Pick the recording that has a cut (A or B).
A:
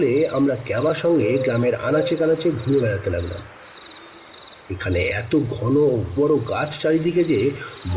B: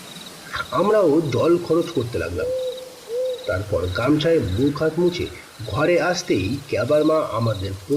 A